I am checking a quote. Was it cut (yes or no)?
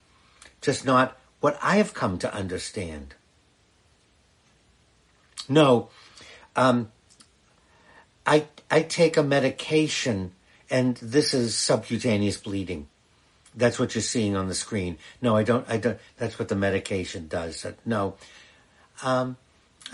yes